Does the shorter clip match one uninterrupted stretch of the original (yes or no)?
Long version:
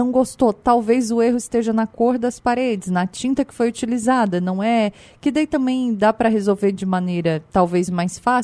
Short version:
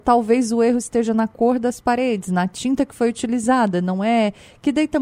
yes